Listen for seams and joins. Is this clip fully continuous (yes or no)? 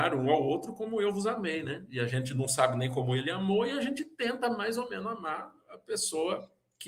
yes